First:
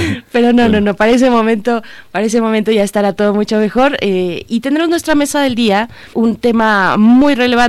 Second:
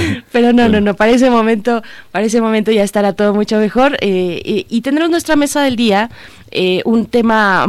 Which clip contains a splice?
first; 2 cuts; at 4.4 s, 6.1 s

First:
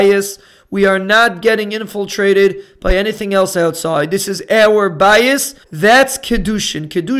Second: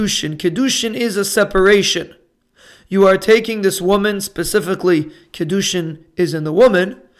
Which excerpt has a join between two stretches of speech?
first; 1 cut; at 5.6 s

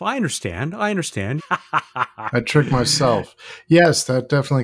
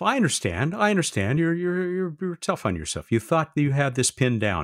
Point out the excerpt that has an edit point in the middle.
first; 1 cut; at 1.4 s

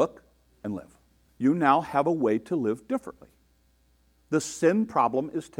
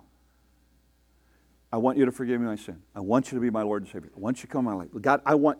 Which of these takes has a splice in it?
first; 1 cut; at 1.3 s

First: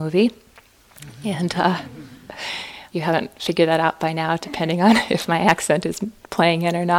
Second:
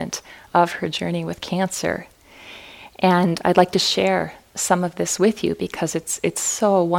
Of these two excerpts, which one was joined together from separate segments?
first; 1 cut; at 2.9 s

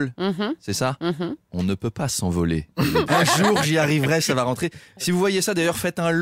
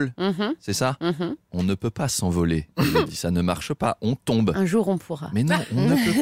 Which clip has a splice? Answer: first; 1 cut; at 3.1 s

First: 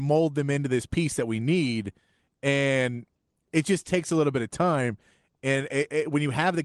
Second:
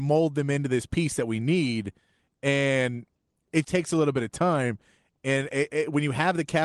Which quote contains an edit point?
second; 1 cut; at 3.6 s

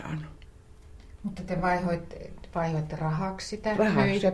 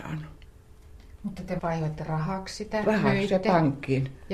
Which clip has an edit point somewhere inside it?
second; 1 cut; at 1.6 s

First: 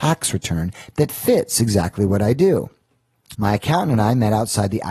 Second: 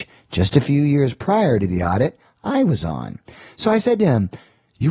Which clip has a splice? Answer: first; 1 cut; at 3.3 s

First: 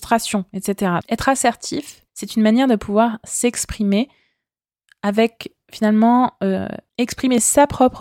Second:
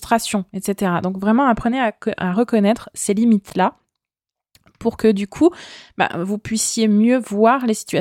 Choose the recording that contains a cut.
first; 3 cuts; at 1.0 s, 2.1 s, 6.9 s

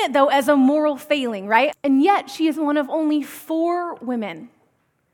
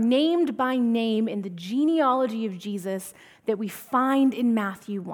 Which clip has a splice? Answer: first; 1 cut; at 1.7 s

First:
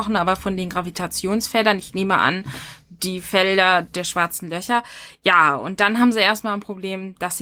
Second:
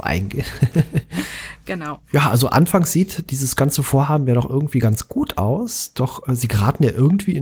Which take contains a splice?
second; 1 cut; at 2.1 s

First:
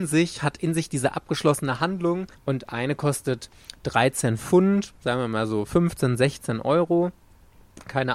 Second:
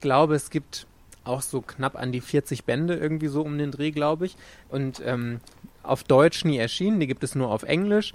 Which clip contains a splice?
first; 1 cut; at 2.3 s

